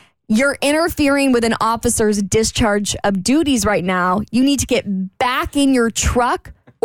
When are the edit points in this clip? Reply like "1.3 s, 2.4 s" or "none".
none